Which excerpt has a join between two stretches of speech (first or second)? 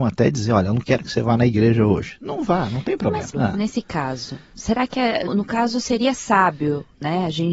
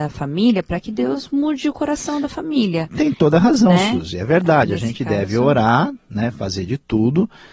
first